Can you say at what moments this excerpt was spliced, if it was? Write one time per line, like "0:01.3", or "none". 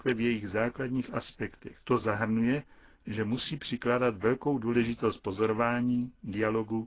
0:01.8